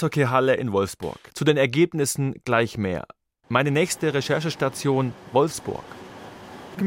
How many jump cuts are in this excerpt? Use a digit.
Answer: 1